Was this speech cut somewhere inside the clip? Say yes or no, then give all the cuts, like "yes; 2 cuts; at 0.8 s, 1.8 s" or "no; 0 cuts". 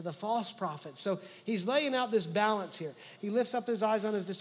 yes; 1 cut; at 3.2 s